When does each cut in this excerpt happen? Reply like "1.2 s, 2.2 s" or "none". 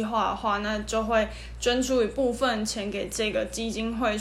none